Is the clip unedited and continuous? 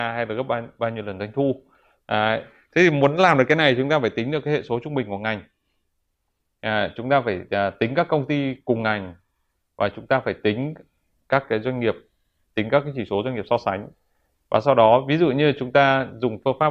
yes; 0 cuts

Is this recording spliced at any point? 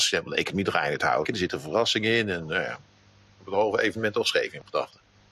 yes; 1 cut; at 1.2 s

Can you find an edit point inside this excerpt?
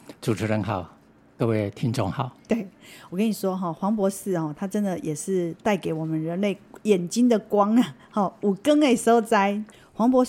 no; 0 cuts

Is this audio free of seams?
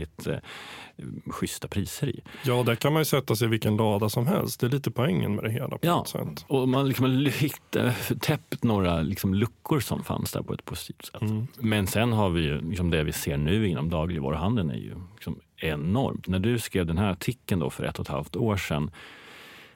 yes; 0 cuts

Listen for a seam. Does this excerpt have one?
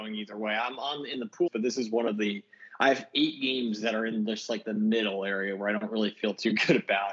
yes; 1 cut; at 1.5 s

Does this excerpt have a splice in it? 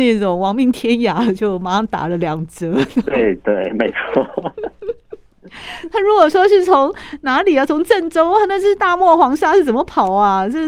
no; 0 cuts

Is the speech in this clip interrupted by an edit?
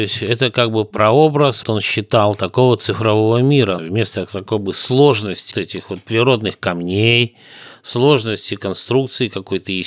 yes; 3 cuts; at 1.6 s, 3.8 s, 5.5 s

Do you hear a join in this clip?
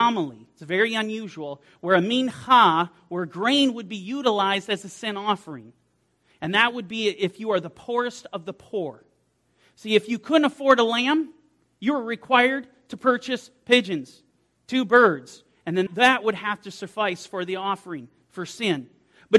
yes; 1 cut; at 15.9 s

